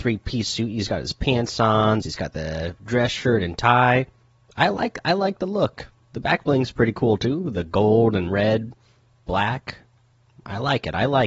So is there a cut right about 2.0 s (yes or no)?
yes